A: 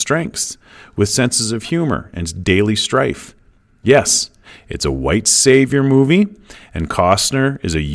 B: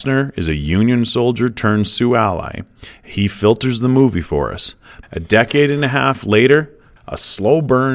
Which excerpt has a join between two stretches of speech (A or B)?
B